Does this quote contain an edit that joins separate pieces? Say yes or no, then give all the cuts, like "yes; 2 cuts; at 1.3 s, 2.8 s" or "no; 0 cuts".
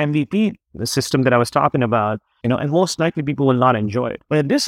yes; 1 cut; at 2.4 s